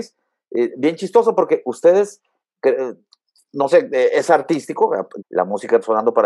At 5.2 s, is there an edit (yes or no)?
yes